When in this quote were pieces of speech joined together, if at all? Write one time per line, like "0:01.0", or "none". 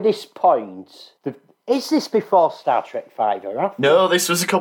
0:01.2